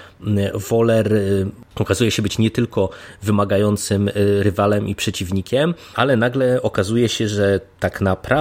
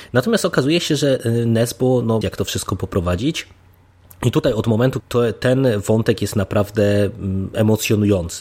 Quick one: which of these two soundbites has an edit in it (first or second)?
second